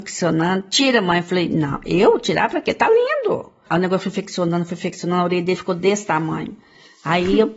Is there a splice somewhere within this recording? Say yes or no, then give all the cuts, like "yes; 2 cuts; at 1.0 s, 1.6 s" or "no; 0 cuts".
yes; 1 cut; at 3.7 s